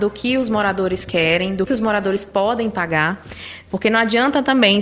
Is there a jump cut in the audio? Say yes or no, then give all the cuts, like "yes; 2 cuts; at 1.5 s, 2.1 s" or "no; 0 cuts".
yes; 2 cuts; at 1.7 s, 3.7 s